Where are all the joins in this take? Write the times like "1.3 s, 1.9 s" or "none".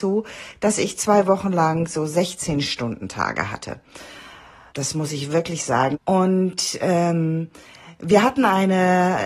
4.7 s, 5.9 s